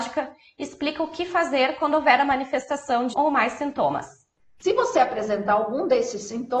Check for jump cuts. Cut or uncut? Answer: cut